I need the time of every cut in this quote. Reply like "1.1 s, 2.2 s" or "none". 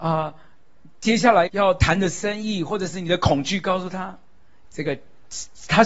1.5 s, 4.6 s